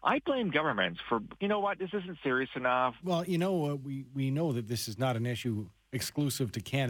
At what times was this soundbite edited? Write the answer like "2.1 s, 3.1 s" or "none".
1.4 s, 3.0 s